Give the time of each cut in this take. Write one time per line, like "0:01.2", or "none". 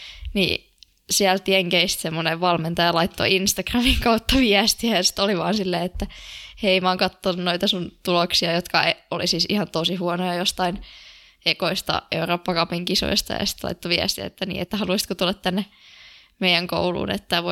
none